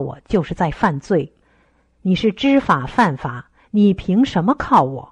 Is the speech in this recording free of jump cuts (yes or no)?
yes